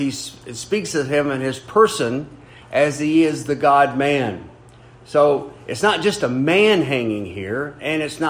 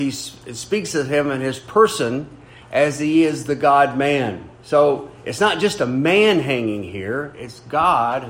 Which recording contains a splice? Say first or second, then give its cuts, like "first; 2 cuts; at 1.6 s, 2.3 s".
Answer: second; 2 cuts; at 4.5 s, 7.3 s